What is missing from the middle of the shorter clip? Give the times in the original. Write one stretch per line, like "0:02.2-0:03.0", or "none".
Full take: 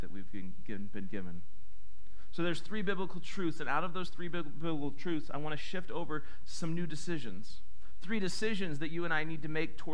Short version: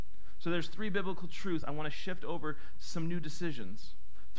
0:03.5-0:05.3